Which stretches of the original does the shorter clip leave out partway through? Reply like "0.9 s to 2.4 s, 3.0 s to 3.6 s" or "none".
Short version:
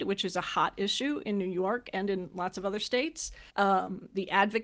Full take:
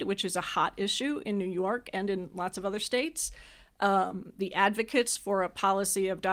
3.5 s to 3.7 s